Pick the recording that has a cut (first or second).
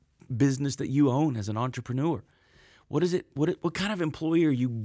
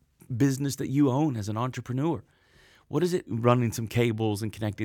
second